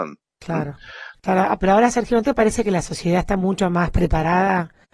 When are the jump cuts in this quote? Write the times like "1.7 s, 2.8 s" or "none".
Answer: 1.1 s